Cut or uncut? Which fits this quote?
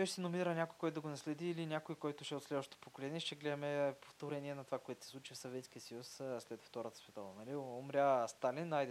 uncut